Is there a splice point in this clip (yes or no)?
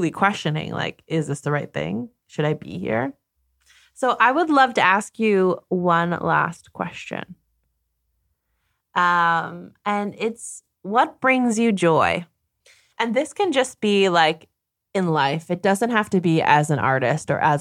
no